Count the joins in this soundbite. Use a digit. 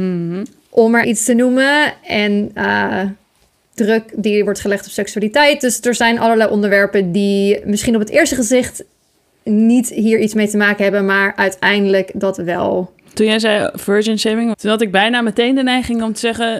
3